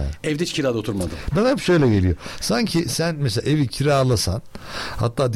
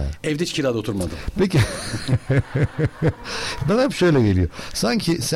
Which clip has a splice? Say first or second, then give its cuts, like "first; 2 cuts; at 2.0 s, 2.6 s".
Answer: first; 1 cut; at 1.3 s